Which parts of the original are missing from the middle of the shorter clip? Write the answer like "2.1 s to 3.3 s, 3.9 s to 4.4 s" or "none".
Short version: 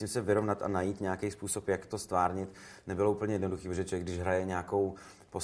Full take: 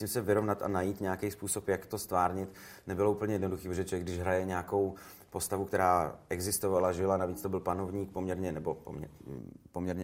none